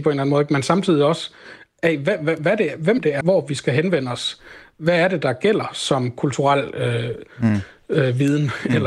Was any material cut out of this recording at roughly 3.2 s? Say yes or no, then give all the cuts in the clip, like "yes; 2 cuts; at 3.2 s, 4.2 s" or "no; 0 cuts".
yes; 1 cut; at 3.2 s